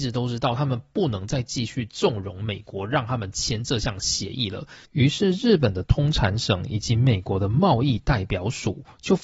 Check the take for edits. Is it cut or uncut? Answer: uncut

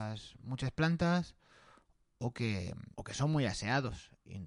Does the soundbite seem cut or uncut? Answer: cut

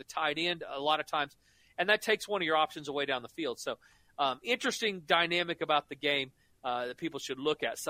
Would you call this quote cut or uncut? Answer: uncut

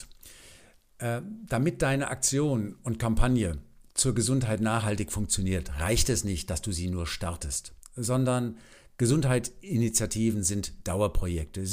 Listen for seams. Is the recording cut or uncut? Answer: uncut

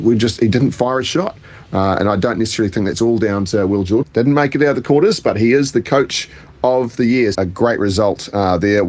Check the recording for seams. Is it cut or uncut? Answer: cut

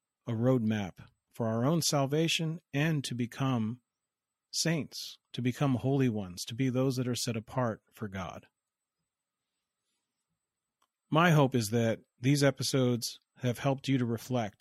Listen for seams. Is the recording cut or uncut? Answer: uncut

